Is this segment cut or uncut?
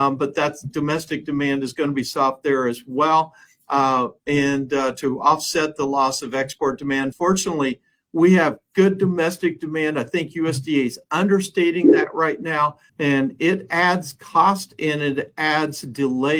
cut